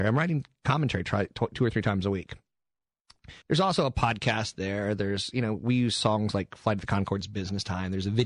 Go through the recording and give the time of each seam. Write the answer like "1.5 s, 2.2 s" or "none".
3.4 s